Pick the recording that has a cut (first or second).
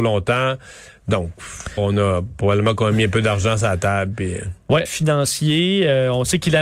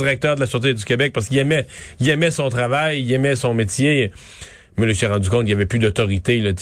first